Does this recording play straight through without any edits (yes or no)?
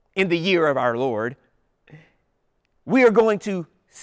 yes